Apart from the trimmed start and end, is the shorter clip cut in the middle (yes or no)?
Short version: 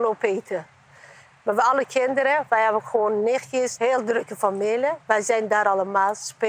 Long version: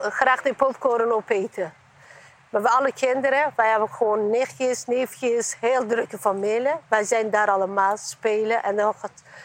yes